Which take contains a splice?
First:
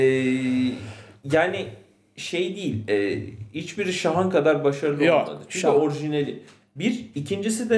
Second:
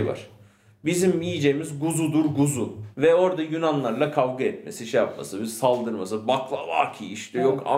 second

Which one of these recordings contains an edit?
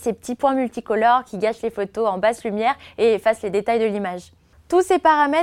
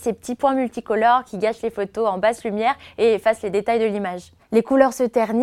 second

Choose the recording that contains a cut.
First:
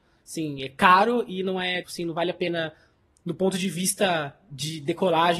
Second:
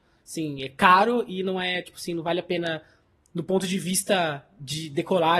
first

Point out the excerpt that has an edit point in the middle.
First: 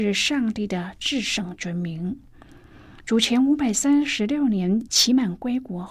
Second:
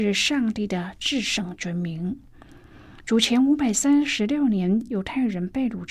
first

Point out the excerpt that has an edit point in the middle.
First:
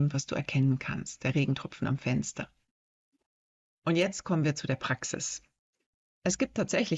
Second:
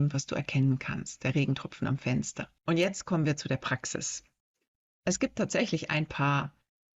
second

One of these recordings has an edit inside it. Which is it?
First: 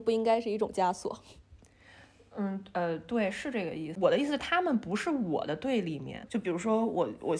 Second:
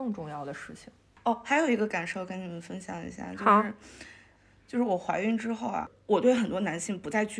first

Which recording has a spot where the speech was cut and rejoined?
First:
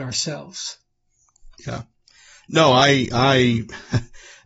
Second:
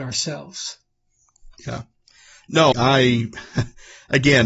second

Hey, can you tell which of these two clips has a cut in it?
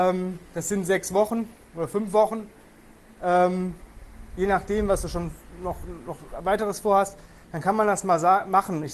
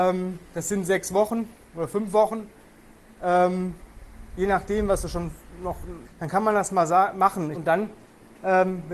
second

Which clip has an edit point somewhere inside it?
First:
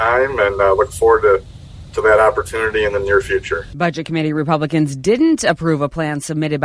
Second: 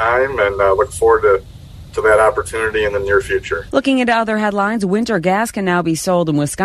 second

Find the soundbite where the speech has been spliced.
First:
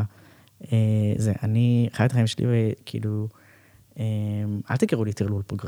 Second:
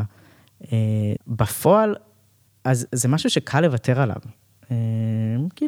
second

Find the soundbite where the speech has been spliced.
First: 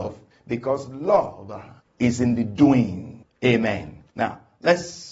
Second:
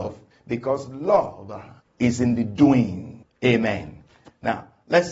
first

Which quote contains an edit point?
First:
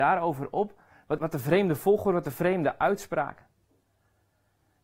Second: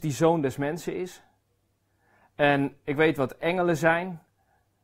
first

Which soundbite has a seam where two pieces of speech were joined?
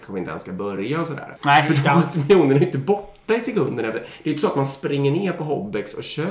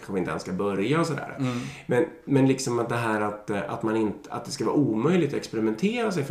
first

